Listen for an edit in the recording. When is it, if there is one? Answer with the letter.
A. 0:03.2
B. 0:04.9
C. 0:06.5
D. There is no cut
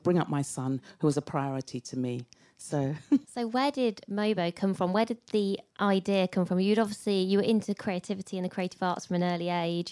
A